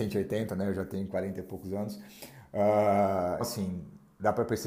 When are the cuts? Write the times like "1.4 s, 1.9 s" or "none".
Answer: 3.4 s